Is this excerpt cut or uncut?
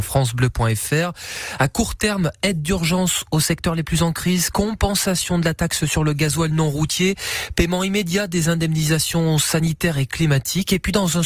uncut